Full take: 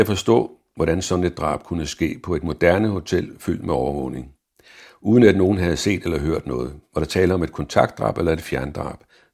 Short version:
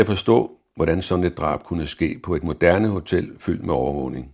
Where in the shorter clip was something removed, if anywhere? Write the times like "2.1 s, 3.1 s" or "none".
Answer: none